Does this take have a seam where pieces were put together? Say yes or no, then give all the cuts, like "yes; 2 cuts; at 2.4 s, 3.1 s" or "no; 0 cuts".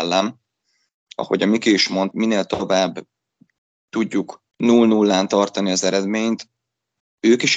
yes; 2 cuts; at 2.1 s, 4.5 s